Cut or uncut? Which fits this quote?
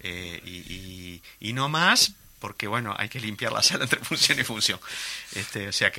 uncut